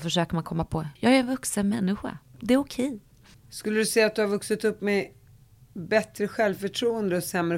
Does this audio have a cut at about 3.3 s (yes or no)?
yes